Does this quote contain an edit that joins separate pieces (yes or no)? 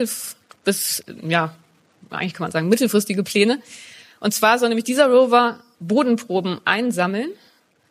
no